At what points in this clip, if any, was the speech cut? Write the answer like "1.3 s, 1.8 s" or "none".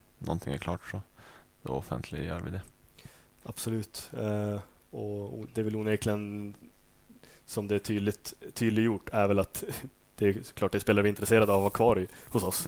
none